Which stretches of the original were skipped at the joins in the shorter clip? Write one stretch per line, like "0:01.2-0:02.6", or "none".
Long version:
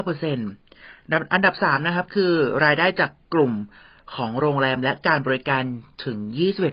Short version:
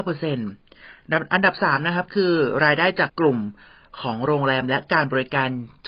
0:03.1-0:03.2